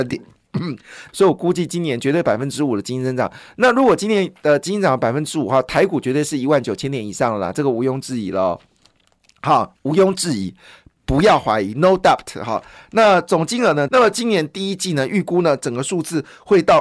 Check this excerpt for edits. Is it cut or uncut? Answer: cut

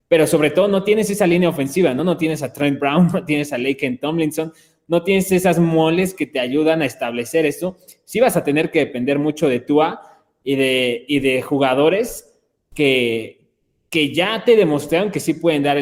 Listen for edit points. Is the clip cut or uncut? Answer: uncut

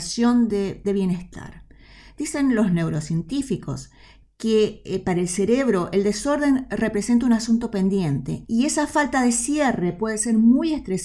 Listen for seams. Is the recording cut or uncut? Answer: cut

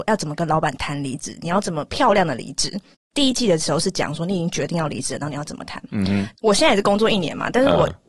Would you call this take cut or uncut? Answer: cut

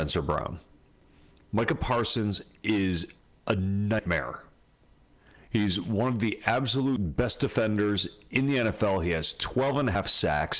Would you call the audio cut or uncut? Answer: uncut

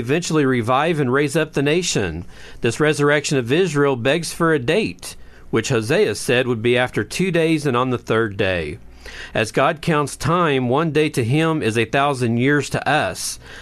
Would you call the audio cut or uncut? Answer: uncut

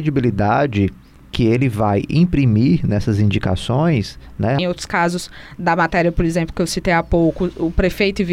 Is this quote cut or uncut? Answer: cut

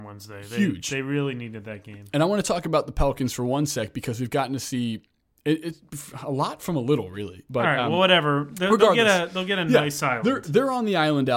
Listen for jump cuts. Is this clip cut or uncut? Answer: cut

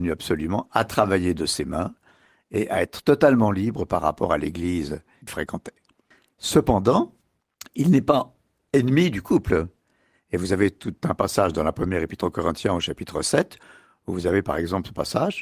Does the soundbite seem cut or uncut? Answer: uncut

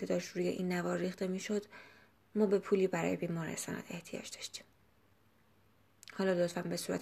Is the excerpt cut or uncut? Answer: uncut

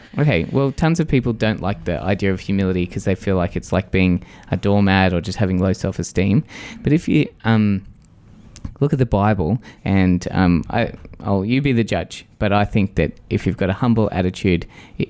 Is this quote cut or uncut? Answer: cut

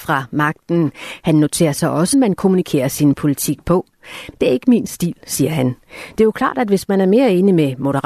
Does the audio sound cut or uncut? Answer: cut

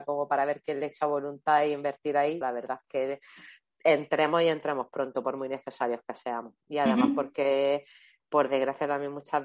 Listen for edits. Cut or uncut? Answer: cut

